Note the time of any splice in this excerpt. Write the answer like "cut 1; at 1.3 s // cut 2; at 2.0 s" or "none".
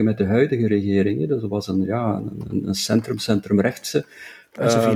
none